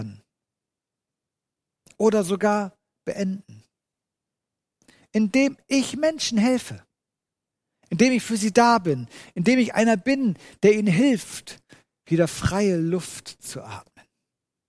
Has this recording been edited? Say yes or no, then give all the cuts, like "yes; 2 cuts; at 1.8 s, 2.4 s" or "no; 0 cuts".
no; 0 cuts